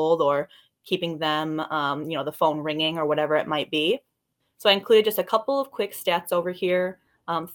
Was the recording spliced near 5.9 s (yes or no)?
no